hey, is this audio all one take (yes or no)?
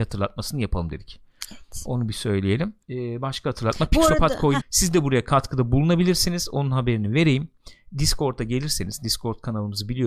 no